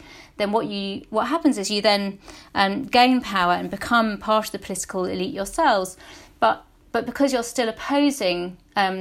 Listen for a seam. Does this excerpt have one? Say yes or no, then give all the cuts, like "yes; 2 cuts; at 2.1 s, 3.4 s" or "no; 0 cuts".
no; 0 cuts